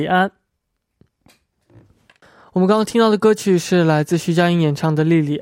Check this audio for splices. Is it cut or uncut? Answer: uncut